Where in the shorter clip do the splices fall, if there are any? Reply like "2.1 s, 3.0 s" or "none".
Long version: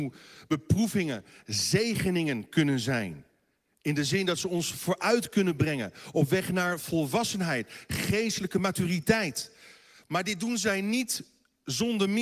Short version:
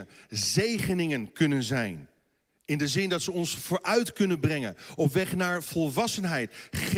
none